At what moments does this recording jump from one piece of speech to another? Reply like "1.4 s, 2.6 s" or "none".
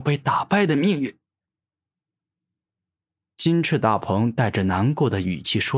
none